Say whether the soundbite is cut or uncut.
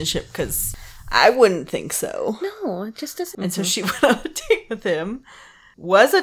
cut